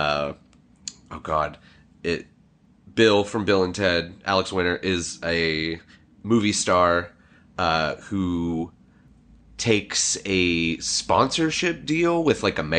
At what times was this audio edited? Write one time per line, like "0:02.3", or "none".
none